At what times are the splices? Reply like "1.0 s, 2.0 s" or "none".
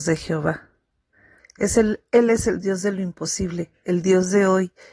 1.4 s